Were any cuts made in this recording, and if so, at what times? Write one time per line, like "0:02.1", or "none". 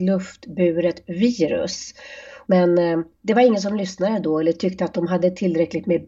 0:02.5